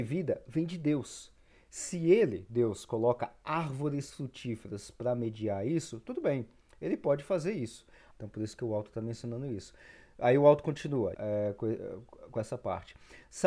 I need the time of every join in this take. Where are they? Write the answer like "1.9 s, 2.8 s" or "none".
8.1 s, 11.1 s